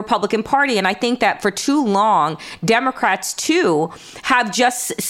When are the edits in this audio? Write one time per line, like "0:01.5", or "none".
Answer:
none